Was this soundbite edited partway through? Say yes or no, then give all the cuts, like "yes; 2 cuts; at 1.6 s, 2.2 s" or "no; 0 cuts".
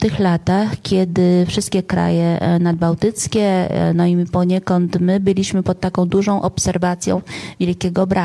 no; 0 cuts